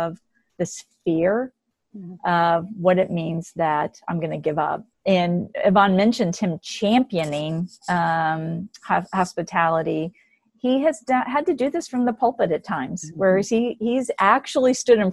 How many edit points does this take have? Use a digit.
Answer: 1